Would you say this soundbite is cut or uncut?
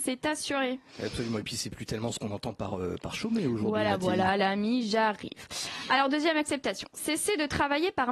uncut